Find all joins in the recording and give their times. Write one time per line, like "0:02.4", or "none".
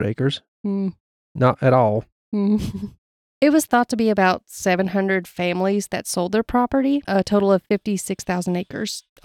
none